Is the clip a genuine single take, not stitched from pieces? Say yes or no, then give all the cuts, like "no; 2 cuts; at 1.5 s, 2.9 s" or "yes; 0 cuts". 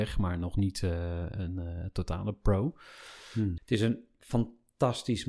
no; 1 cut; at 3.6 s